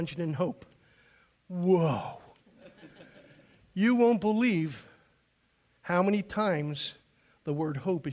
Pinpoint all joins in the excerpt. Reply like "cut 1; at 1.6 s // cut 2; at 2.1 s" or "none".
none

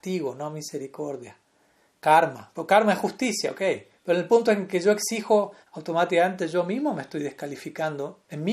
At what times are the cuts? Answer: cut 1; at 5.6 s

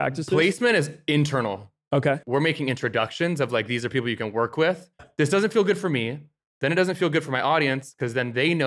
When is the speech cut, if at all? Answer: cut 1; at 2.2 s // cut 2; at 5.0 s

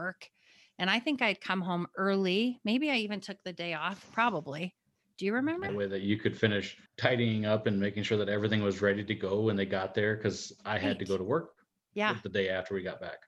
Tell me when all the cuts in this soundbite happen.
cut 1; at 5.7 s // cut 2; at 6.9 s

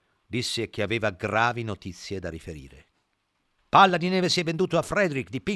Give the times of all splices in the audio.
cut 1; at 3.6 s

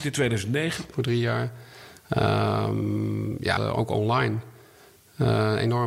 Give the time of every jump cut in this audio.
cut 1; at 0.9 s // cut 2; at 3.6 s

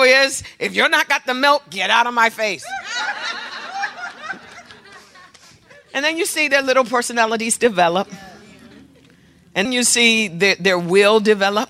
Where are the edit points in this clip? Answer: cut 1; at 9.7 s

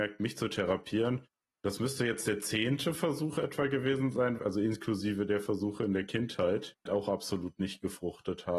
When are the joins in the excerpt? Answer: cut 1; at 4.4 s // cut 2; at 6.9 s

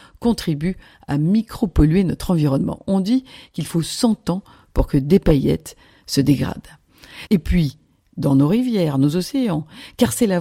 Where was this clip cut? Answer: cut 1; at 7.3 s

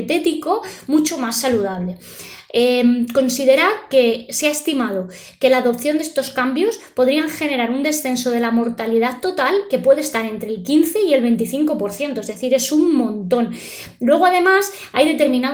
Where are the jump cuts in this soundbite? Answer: none

